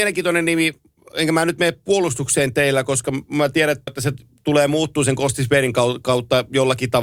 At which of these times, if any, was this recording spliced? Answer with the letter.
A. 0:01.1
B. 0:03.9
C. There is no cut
B